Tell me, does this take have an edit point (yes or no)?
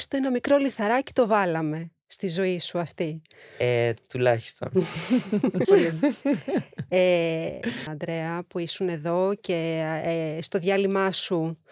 yes